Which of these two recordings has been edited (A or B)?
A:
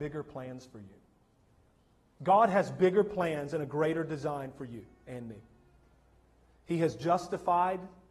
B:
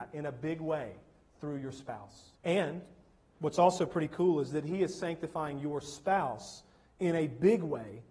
B